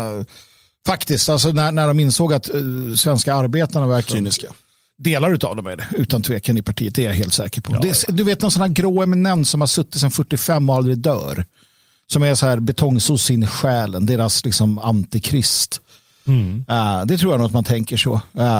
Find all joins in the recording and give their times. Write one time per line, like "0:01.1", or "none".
0:04.1